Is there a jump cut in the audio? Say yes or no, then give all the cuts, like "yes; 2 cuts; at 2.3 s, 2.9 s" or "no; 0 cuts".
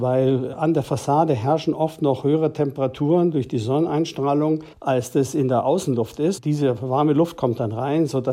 yes; 1 cut; at 4.7 s